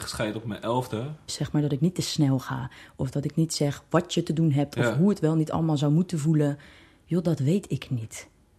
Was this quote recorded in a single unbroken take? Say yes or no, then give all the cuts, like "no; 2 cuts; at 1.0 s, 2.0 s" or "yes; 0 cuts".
no; 1 cut; at 1.3 s